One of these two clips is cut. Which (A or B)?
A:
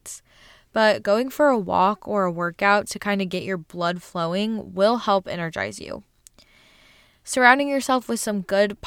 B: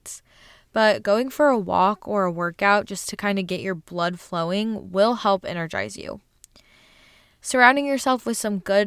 A